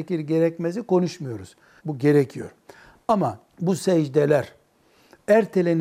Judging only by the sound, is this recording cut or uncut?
cut